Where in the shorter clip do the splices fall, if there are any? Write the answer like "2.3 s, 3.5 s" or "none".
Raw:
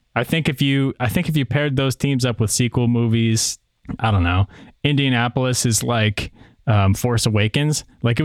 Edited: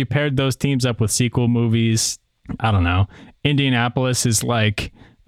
none